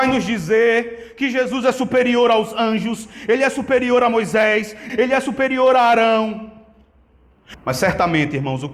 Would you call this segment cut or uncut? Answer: cut